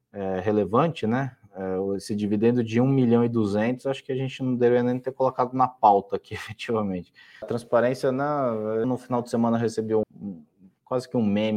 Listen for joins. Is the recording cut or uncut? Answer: cut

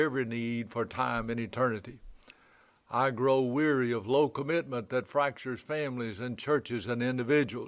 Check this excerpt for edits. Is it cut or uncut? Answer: uncut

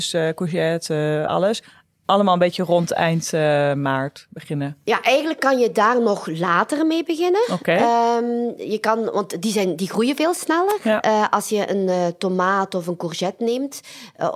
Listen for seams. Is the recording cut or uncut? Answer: uncut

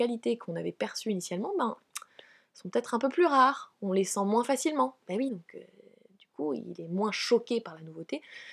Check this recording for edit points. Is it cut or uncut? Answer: cut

